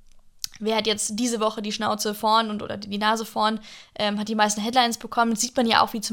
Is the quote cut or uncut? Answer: uncut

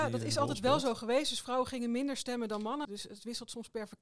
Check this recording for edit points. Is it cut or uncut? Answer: cut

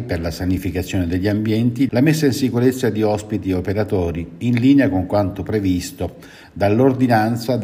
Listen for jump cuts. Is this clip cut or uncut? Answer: cut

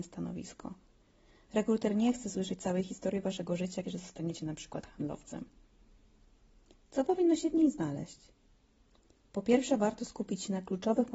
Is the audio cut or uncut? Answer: cut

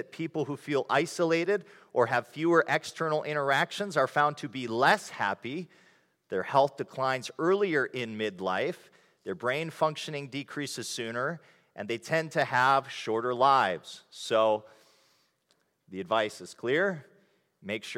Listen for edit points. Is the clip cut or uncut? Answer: uncut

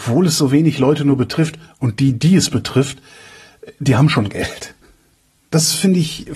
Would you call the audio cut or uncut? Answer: uncut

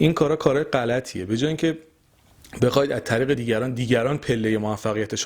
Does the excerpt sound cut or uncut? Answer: uncut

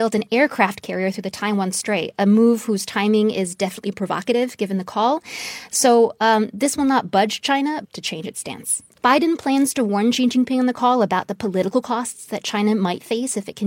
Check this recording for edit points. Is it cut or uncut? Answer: cut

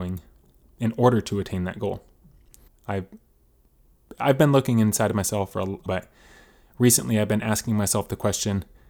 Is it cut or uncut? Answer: cut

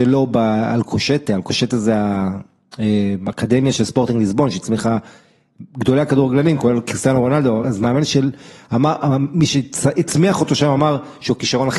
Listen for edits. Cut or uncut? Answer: uncut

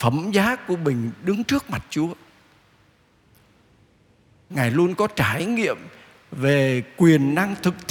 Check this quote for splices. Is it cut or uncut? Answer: uncut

